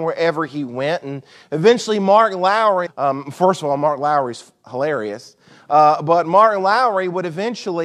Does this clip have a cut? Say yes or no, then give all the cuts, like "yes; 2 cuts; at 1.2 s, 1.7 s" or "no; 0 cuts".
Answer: yes; 1 cut; at 2.9 s